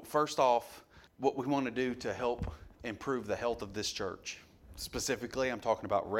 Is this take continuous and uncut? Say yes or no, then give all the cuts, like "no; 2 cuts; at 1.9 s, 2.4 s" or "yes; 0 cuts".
no; 1 cut; at 1.1 s